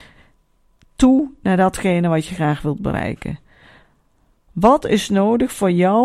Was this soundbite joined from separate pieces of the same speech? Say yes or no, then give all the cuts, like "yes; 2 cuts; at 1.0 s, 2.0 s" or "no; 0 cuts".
no; 0 cuts